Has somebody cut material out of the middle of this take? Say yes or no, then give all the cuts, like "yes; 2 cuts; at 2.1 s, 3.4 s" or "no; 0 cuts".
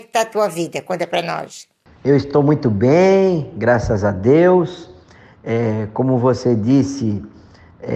no; 0 cuts